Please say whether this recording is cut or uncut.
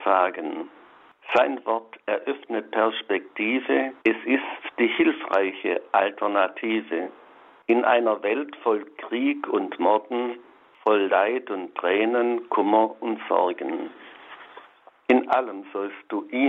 cut